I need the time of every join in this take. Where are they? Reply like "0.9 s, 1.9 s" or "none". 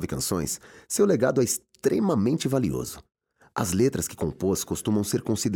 none